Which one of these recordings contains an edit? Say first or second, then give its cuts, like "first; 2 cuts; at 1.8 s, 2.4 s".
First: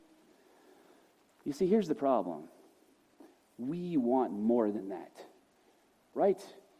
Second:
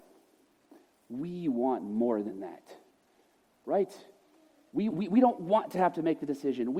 second; 1 cut; at 4.9 s